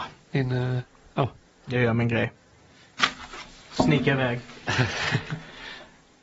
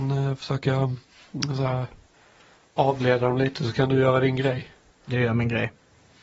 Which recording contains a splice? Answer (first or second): second